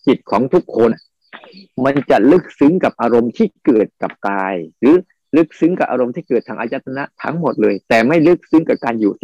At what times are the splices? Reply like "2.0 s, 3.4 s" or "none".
0.9 s, 4.7 s